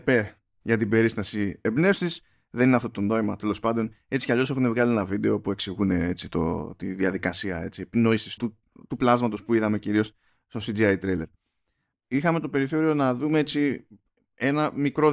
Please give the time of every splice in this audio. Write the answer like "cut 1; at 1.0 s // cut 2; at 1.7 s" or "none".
cut 1; at 8.4 s // cut 2; at 11.9 s

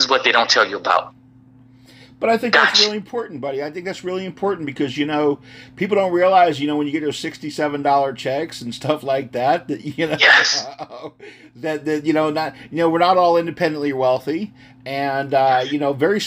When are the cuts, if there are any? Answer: none

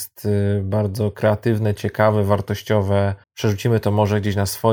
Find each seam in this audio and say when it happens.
cut 1; at 3.2 s

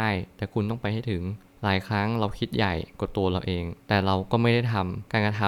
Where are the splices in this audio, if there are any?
cut 1; at 3.8 s

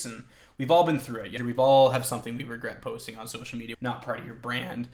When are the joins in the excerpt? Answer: cut 1; at 1.4 s // cut 2; at 3.7 s

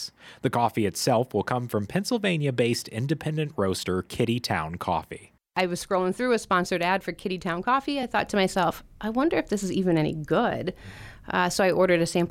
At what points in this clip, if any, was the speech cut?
none

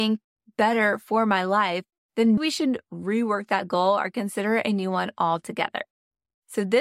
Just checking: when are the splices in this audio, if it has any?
cut 1; at 2.4 s

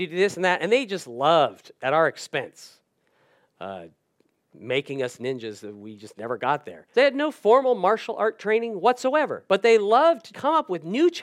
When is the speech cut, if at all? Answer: cut 1; at 6.9 s // cut 2; at 10.3 s

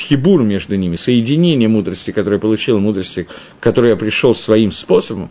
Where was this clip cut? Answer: none

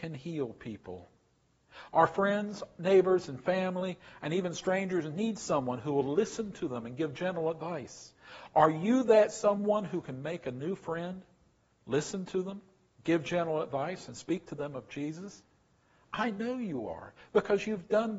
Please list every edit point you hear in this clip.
none

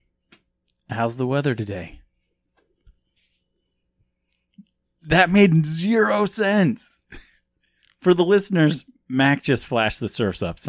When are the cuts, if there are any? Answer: none

